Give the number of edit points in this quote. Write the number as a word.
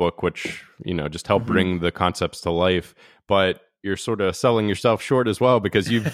zero